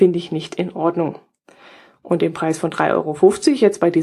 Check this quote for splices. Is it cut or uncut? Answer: uncut